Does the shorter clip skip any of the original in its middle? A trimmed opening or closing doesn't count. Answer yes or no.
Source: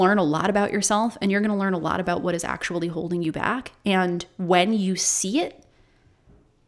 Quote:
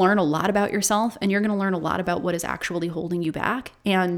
no